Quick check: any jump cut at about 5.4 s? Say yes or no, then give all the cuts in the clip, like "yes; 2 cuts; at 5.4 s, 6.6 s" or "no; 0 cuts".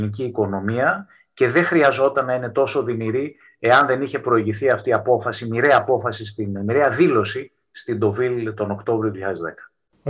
no; 0 cuts